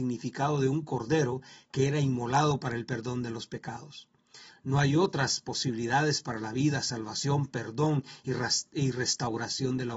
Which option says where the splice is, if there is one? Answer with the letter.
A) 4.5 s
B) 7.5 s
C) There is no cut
A